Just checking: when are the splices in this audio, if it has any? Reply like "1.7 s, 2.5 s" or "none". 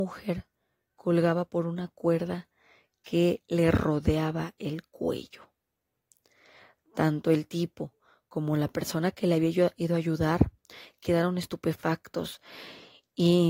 none